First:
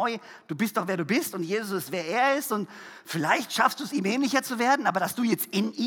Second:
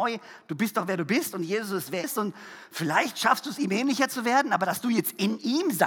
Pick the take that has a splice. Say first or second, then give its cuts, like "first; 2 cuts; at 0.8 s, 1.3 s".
second; 1 cut; at 2.0 s